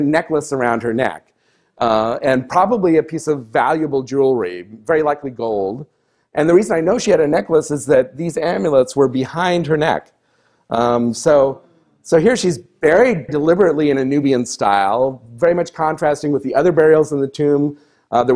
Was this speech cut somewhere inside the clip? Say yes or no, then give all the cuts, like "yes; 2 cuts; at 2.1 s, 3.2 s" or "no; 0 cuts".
yes; 1 cut; at 13.3 s